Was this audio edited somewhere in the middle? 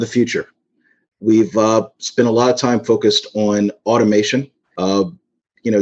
yes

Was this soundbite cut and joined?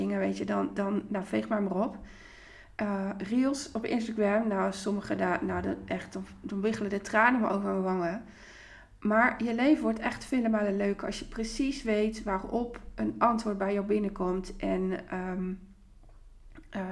no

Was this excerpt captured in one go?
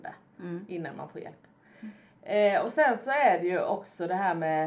yes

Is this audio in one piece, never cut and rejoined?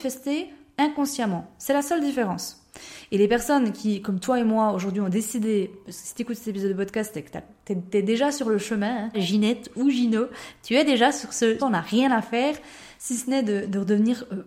no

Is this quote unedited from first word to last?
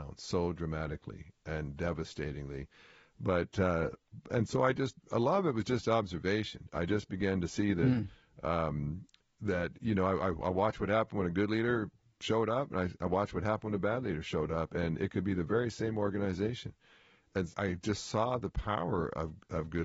no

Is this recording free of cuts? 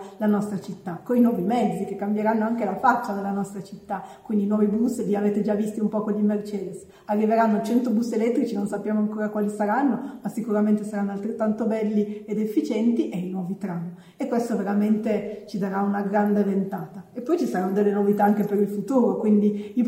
yes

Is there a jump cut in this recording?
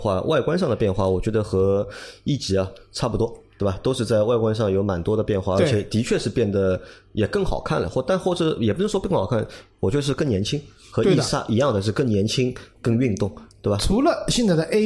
no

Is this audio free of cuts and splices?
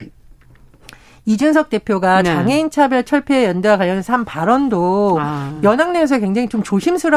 yes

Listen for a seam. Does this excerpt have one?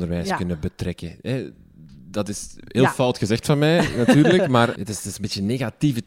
yes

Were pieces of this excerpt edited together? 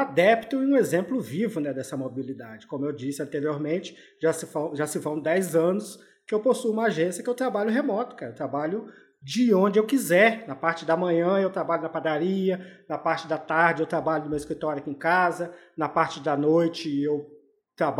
no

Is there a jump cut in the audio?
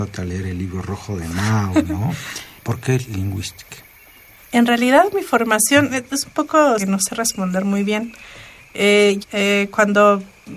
yes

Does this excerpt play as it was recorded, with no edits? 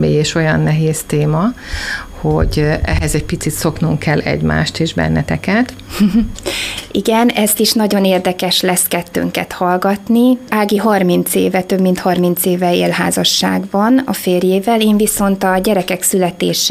no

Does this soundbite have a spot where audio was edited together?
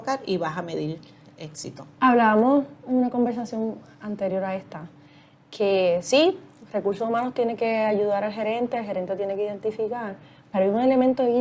no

